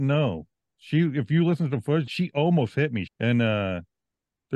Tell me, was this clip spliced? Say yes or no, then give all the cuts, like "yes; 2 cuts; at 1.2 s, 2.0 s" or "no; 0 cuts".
yes; 2 cuts; at 2.1 s, 3.1 s